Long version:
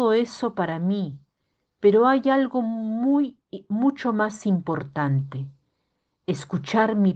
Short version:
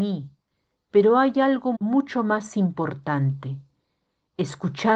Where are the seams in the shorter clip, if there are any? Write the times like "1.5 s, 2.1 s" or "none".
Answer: 1.7 s